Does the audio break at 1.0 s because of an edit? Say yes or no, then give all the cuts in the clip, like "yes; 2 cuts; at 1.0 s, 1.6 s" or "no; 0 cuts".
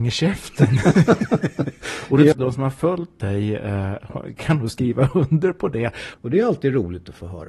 no; 2 cuts; at 2.3 s, 6.1 s